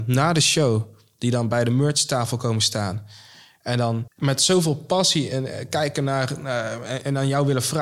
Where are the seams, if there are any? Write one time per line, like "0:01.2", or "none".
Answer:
none